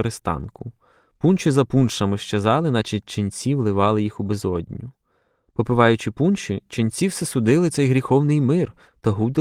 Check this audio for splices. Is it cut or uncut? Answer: uncut